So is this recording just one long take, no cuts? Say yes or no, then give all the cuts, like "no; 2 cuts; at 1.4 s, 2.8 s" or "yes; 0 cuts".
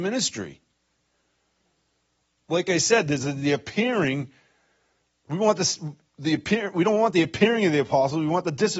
yes; 0 cuts